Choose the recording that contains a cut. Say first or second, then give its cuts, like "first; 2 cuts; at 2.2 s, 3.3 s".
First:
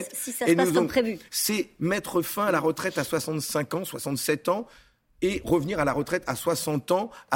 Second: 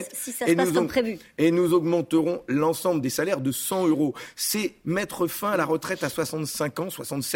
first; 1 cut; at 1.3 s